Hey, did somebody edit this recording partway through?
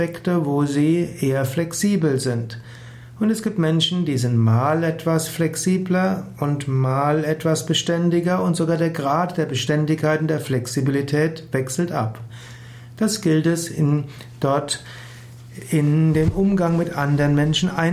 no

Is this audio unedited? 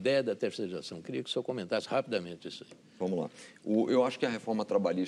yes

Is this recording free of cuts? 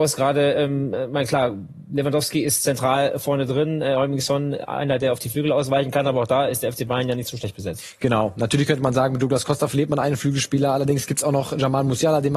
yes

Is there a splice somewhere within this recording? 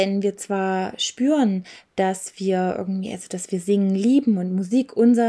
no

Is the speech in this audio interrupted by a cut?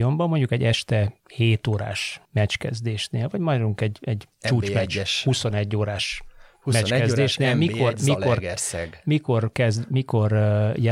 no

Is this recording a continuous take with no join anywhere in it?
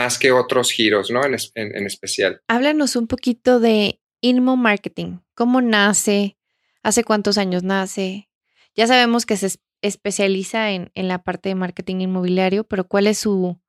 yes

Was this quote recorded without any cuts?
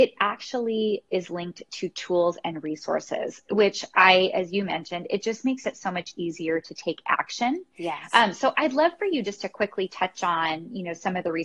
yes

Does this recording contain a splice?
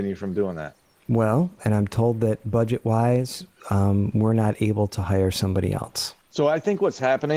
yes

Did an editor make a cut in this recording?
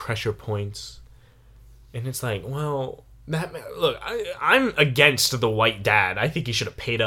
no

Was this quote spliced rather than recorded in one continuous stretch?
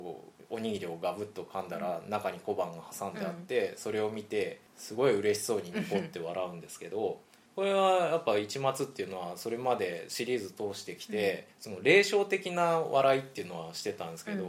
no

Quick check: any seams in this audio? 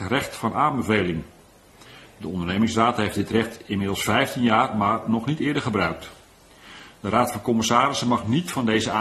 no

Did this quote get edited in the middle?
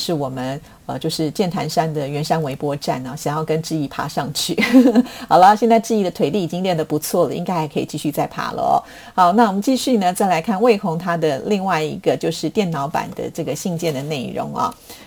no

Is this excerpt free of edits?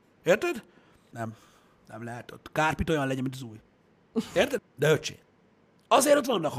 no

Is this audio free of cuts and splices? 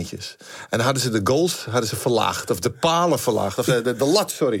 yes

